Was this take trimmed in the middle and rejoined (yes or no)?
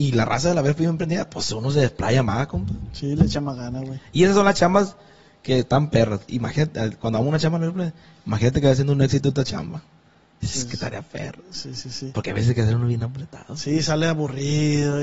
yes